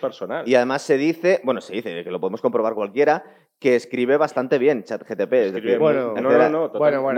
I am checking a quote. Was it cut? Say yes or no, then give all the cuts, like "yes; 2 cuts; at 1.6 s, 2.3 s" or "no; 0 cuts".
no; 0 cuts